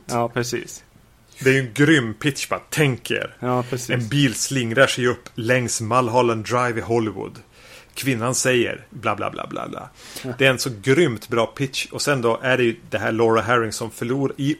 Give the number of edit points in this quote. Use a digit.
1